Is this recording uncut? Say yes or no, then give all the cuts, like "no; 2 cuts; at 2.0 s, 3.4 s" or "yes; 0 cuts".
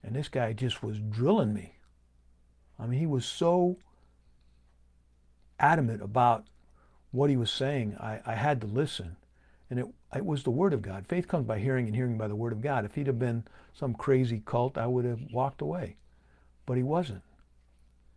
yes; 0 cuts